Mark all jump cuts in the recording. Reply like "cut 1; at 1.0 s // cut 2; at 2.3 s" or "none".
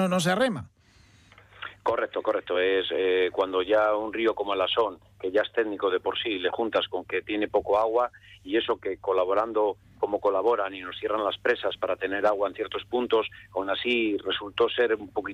none